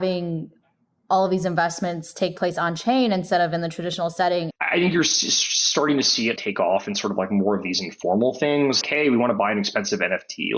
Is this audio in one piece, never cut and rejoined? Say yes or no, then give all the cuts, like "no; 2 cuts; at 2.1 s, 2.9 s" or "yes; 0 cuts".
no; 3 cuts; at 4.5 s, 6.4 s, 8.8 s